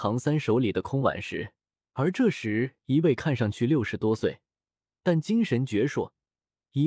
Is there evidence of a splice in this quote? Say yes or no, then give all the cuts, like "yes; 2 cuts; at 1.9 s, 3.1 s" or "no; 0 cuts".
yes; 2 cuts; at 1.9 s, 5.0 s